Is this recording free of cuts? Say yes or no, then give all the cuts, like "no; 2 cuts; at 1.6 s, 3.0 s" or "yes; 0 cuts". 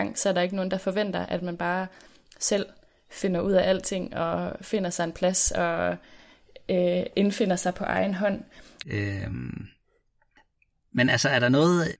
no; 1 cut; at 8.8 s